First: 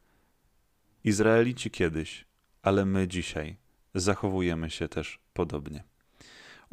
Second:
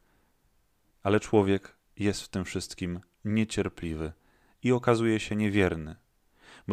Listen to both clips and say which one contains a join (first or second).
second